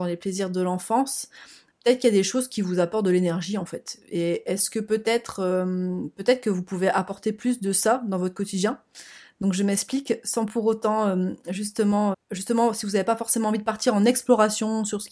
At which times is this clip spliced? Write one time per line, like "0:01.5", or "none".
0:12.1